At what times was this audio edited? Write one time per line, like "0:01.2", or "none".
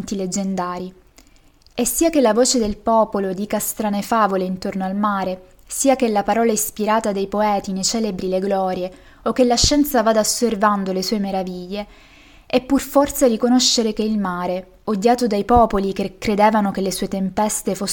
none

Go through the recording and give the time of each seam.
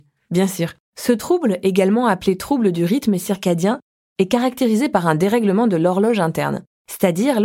none

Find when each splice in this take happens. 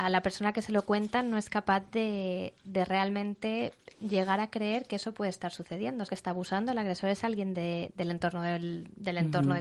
0:06.1

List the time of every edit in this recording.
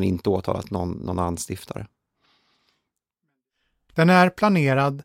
0:03.9

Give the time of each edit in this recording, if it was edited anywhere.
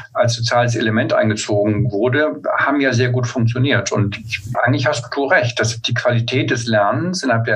0:04.5
0:05.8

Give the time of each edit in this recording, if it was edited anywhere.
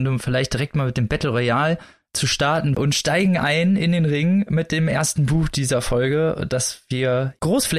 0:02.7

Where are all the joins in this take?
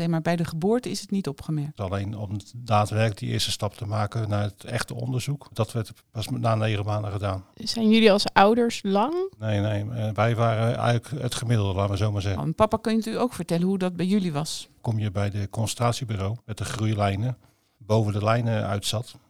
0:01.8
0:12.4
0:17.7

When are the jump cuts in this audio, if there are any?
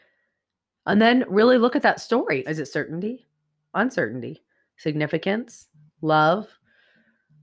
0:02.4

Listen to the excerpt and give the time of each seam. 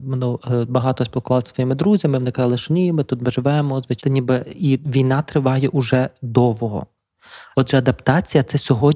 0:04.0
0:07.5

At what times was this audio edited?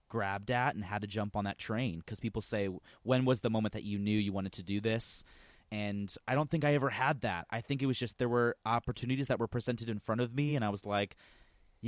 none

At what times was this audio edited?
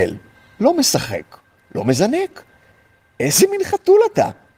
0:01.6

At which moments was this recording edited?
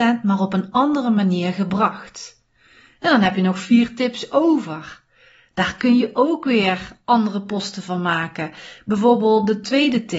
none

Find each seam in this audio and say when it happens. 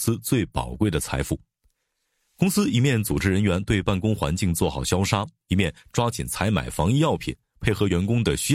none

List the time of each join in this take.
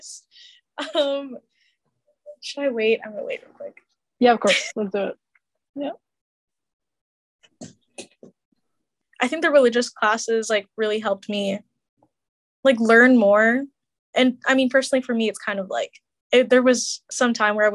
none

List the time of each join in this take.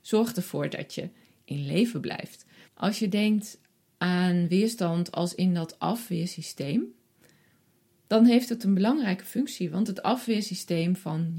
0:02.7

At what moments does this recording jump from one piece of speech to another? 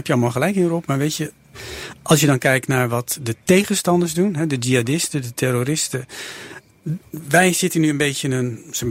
none

